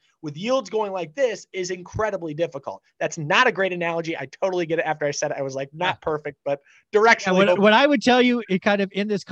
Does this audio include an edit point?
yes; 1 cut; at 7.6 s

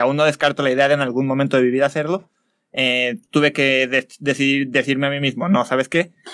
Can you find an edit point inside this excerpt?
no; 0 cuts

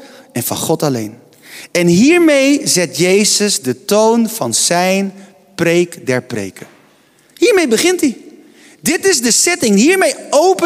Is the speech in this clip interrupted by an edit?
no; 0 cuts

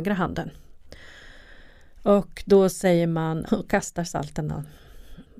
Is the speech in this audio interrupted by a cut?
yes; 1 cut; at 3.5 s

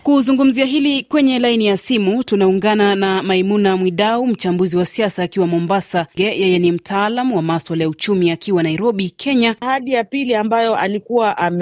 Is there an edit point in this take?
yes; 2 cuts; at 6.2 s, 9.6 s

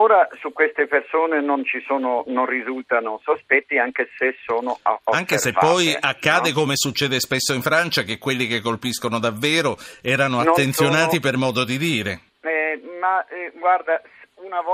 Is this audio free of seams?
no; 1 cut; at 12.3 s

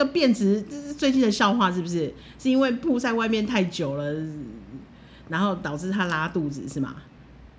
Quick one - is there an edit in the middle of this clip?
no; 0 cuts

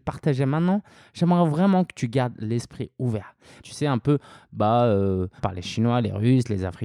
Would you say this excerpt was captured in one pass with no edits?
no; 2 cuts; at 3.6 s, 5.4 s

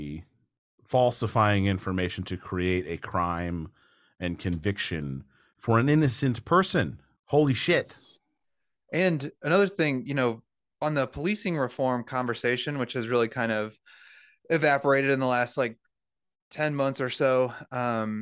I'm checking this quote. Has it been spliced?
yes; 1 cut; at 7.2 s

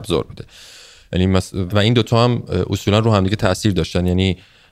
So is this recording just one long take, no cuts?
no; 1 cut; at 1.7 s

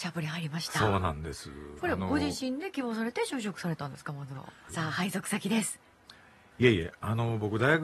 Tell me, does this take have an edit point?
yes; 3 cuts; at 1.8 s, 4.7 s, 6.5 s

